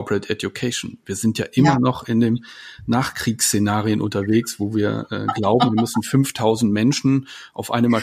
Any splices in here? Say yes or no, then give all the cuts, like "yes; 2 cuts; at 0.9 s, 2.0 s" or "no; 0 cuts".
no; 0 cuts